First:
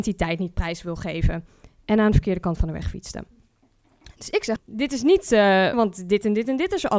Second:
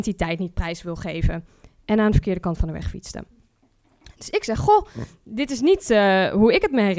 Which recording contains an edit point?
first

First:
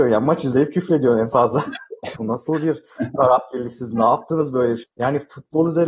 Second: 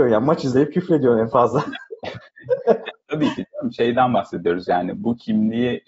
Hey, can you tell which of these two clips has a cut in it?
first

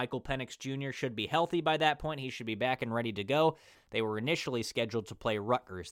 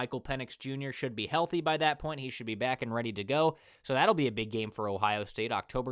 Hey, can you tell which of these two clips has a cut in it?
first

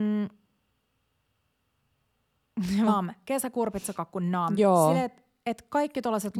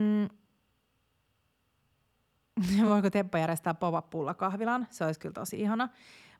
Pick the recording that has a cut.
first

